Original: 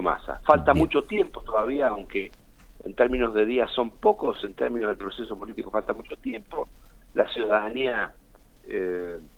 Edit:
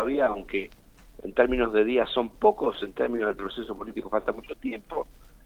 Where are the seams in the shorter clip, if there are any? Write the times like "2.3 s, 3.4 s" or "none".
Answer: none